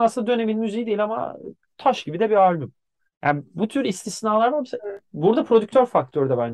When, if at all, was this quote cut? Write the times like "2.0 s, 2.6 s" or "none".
none